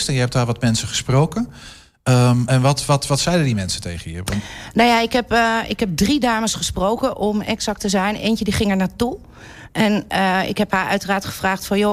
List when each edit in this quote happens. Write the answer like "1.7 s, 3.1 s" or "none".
none